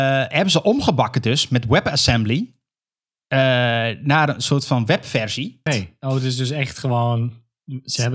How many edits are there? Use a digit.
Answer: 1